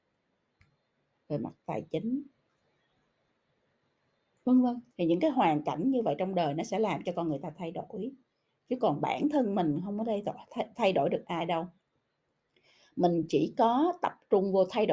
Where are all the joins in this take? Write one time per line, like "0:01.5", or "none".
0:04.9

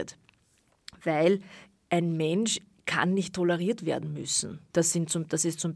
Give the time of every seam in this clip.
0:04.7

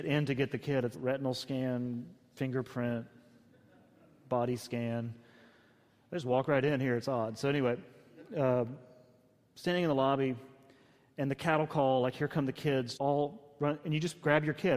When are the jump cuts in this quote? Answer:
0:00.9
0:12.9

